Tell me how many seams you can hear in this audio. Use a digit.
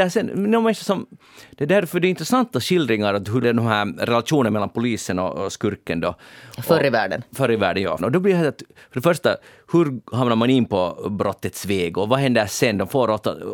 2